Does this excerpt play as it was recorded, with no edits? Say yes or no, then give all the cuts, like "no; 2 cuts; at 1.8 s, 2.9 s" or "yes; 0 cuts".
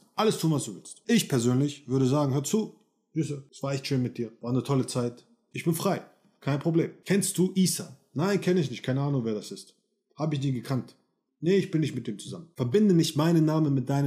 no; 1 cut; at 5.5 s